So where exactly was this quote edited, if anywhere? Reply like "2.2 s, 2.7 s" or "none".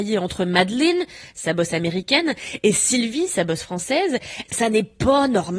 4.5 s